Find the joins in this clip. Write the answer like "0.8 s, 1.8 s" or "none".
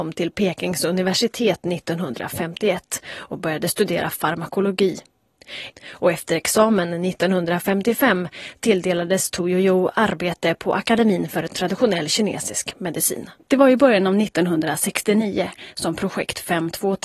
5.7 s, 13.5 s